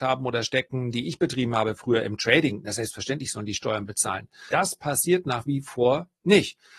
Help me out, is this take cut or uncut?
cut